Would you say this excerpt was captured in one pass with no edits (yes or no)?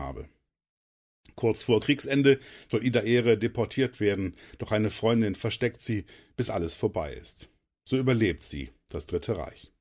yes